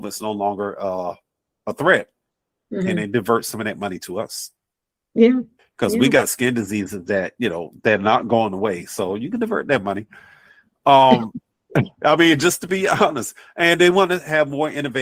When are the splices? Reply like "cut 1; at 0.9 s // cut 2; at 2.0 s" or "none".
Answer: none